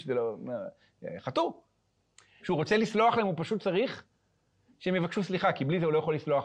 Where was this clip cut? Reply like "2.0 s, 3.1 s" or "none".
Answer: 2.4 s